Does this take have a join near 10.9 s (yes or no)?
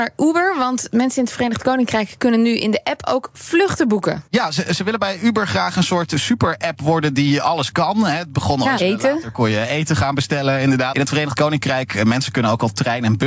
yes